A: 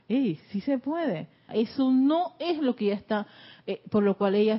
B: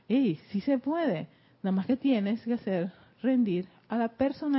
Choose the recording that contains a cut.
A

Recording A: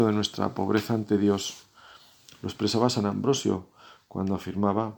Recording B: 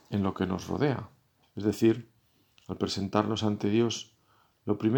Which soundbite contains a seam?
B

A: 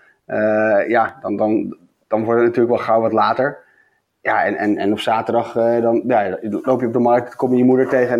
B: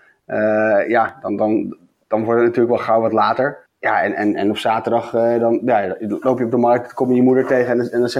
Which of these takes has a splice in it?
B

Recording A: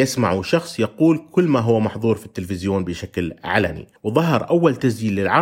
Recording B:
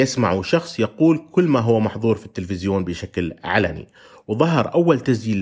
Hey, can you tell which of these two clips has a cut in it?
A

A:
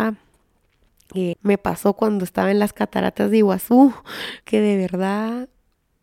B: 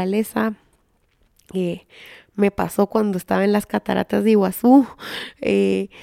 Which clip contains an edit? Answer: A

